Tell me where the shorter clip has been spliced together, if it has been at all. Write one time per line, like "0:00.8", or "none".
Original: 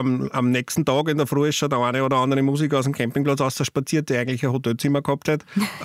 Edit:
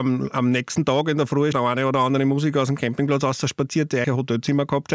0:01.5
0:04.0